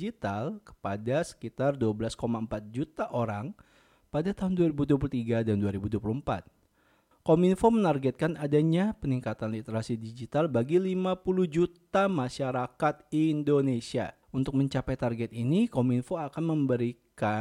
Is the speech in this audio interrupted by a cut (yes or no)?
yes